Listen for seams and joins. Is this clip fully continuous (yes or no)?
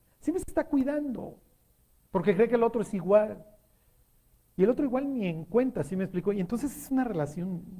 yes